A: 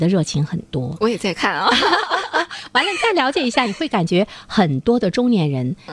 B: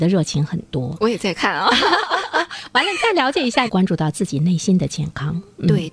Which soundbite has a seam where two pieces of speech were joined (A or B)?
B